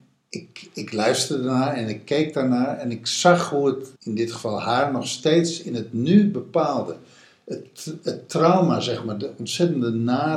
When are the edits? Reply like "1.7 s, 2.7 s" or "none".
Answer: 4.0 s